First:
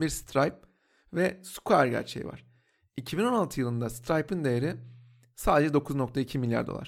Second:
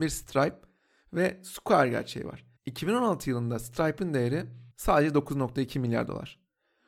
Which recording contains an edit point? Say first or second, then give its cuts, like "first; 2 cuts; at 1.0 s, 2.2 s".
second; 2 cuts; at 2.6 s, 4.7 s